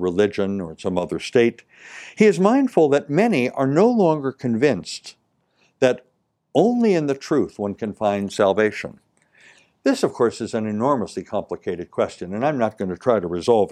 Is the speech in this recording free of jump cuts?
yes; 0 cuts

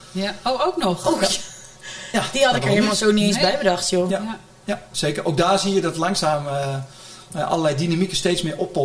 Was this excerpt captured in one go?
yes; 0 cuts

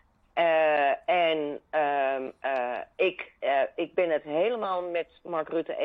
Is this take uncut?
yes; 0 cuts

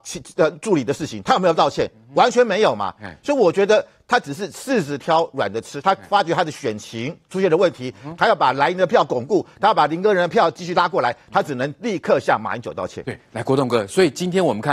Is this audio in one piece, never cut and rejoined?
yes; 0 cuts

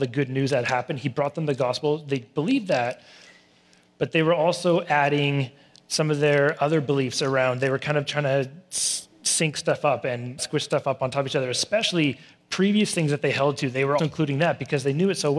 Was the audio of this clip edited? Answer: yes; 2 cuts; at 10.4 s, 14.0 s

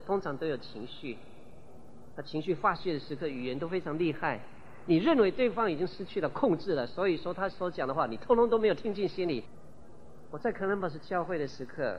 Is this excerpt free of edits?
yes; 0 cuts

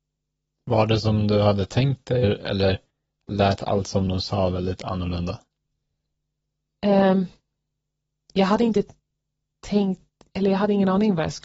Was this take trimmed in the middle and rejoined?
yes; 1 cut; at 2.2 s

